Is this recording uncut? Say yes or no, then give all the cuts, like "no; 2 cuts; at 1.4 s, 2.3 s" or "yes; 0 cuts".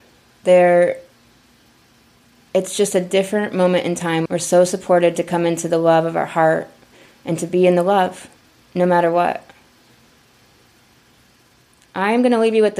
no; 1 cut; at 4.3 s